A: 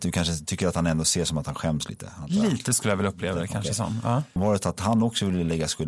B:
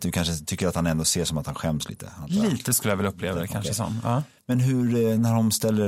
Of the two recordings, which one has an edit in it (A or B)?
A